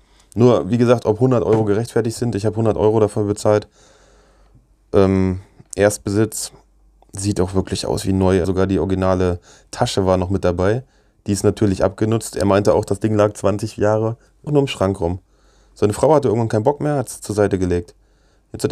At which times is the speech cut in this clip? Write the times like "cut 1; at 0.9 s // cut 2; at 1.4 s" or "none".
cut 1; at 8.4 s // cut 2; at 14.5 s